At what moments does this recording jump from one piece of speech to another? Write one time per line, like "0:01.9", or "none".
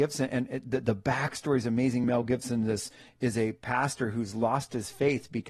none

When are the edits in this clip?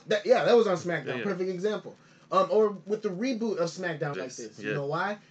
0:02.9
0:04.1

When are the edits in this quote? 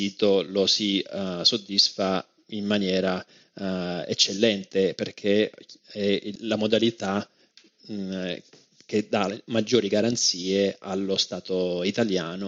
0:06.4

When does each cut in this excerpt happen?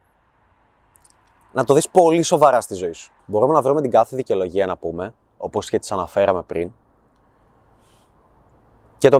0:03.2

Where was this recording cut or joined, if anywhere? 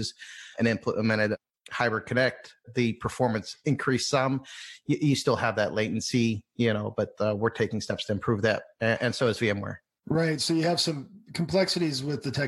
none

